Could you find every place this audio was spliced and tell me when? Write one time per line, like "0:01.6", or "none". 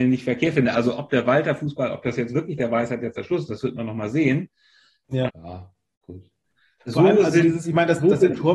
0:05.3
0:06.8